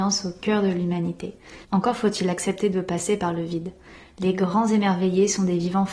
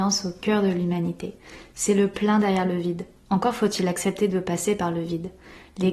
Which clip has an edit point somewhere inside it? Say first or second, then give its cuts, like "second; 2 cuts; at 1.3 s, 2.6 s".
first; 1 cut; at 1.6 s